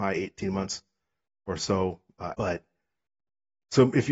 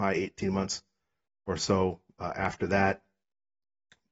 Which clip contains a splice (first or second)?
first